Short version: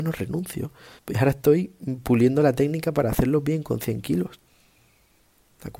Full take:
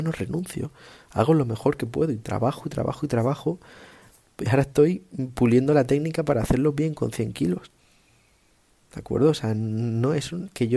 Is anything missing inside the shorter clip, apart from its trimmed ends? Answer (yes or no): yes